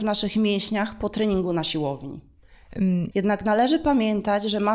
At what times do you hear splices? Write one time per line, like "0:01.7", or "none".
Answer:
0:03.1